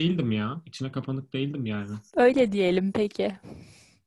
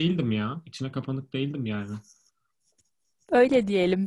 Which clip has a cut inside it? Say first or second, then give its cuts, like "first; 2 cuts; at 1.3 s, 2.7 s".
first; 1 cut; at 2.1 s